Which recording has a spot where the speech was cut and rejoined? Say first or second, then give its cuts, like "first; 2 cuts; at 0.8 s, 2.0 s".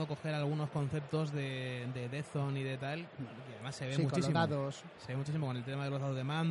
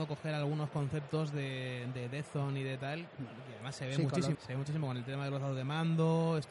second; 1 cut; at 4.3 s